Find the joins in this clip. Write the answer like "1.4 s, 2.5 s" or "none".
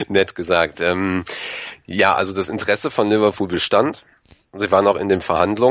none